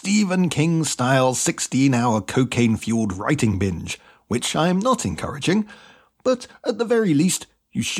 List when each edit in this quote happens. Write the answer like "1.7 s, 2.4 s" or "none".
none